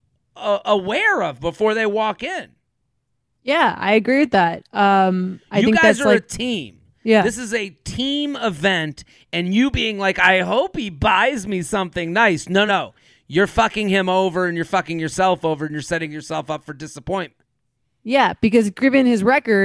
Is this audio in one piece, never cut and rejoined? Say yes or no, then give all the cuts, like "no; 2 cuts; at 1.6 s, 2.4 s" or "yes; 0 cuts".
no; 1 cut; at 12.7 s